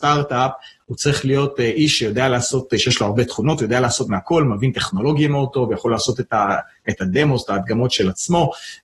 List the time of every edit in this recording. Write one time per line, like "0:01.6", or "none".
none